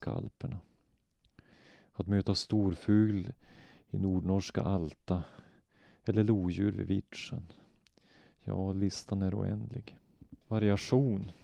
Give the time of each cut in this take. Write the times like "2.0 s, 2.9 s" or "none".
10.4 s